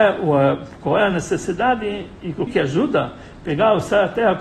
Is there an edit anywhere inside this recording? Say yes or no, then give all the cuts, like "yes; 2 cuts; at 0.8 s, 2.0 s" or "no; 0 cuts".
yes; 1 cut; at 2.5 s